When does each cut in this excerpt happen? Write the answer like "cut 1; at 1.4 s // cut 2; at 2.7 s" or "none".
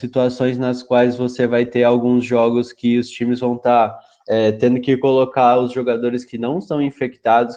none